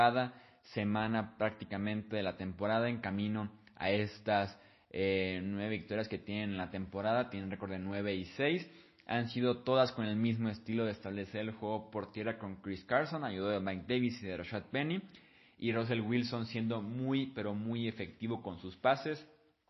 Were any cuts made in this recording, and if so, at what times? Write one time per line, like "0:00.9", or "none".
none